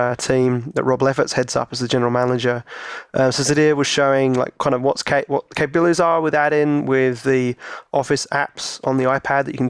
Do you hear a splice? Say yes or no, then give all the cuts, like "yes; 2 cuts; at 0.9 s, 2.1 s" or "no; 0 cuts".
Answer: no; 0 cuts